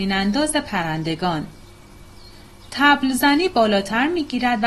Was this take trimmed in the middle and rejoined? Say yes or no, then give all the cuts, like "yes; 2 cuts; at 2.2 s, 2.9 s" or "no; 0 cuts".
no; 0 cuts